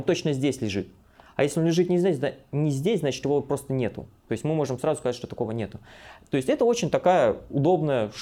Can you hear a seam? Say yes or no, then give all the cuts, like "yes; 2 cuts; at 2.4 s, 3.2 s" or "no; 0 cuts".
no; 0 cuts